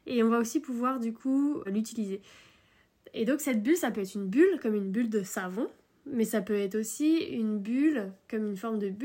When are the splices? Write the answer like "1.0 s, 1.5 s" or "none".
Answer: 1.7 s